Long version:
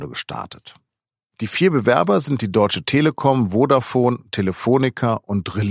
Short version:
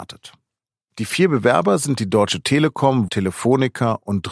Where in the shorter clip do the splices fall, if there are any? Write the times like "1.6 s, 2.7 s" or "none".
3.1 s

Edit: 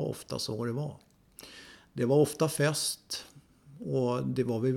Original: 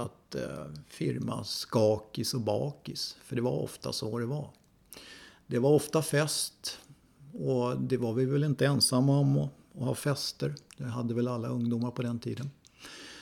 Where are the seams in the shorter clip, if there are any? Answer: none

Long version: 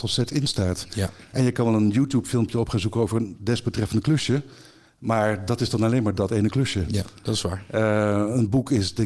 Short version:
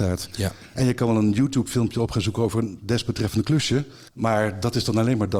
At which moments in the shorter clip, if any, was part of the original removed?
4.1 s

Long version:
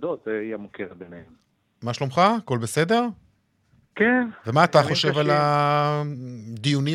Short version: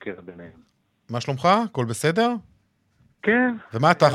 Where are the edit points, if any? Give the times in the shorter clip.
none

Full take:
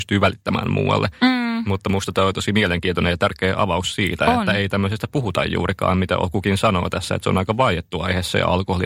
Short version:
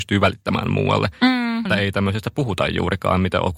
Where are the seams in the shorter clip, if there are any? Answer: 1.6 s

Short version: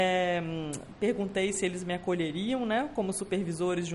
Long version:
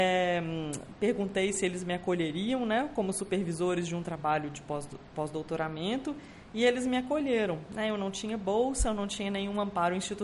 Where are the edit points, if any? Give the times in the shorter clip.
none

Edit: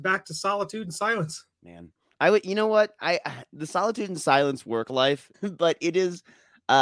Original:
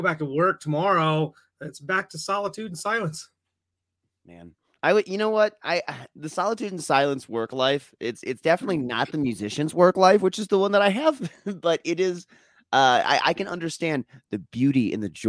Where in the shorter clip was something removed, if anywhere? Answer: 1.5 s, 5.3 s

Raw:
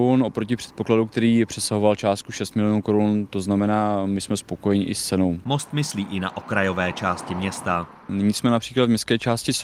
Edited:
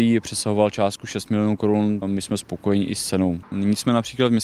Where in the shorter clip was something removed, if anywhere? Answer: 2.0 s, 3.4 s

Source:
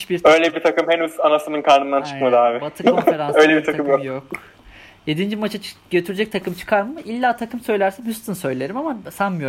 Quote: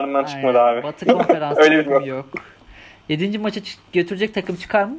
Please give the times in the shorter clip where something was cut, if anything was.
1.8 s

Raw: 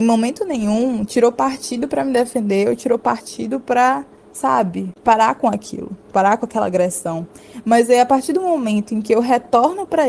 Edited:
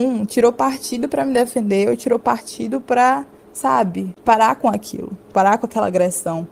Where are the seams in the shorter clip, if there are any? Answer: none

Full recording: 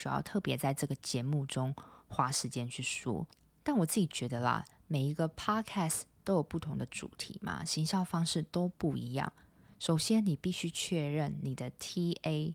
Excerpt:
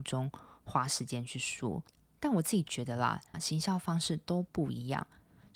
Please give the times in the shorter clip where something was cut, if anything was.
3.3 s

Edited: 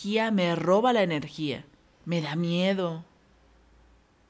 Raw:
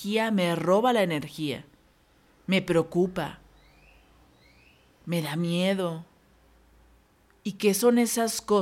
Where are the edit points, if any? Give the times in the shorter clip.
1.9 s

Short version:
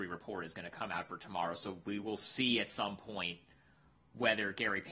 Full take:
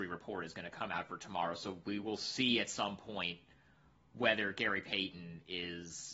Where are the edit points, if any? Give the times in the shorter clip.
none

